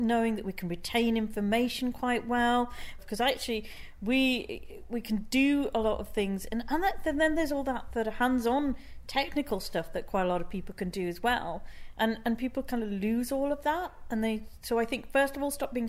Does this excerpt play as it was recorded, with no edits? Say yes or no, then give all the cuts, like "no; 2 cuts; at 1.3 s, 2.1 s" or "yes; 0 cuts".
no; 1 cut; at 3.0 s